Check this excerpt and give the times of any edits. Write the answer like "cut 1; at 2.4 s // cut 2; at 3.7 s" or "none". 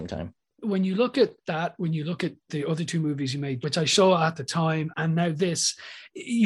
cut 1; at 3.6 s // cut 2; at 4.9 s